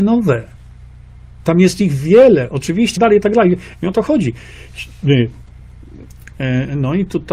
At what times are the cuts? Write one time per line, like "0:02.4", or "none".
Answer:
0:03.0
0:06.3